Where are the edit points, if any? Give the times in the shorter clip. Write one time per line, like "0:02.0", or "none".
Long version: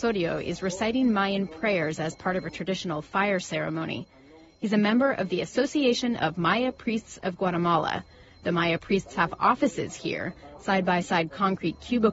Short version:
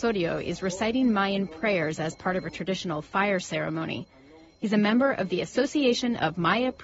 none